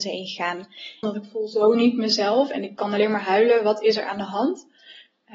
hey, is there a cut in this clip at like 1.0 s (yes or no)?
yes